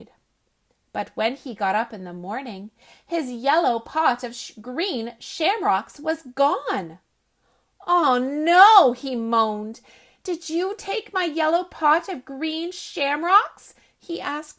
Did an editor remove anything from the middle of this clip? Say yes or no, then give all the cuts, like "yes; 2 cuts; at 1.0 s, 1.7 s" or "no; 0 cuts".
no; 0 cuts